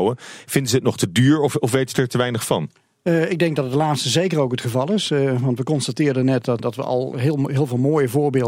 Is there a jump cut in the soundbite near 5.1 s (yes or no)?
no